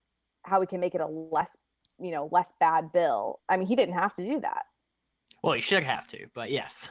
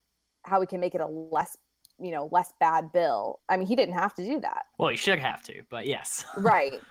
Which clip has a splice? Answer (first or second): second